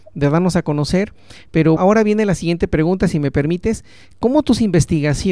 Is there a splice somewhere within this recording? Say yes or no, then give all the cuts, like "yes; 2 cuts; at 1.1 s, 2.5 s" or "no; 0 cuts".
yes; 1 cut; at 1.8 s